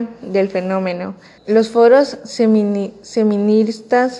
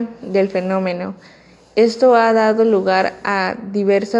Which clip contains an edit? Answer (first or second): first